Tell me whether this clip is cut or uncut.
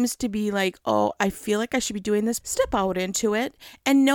cut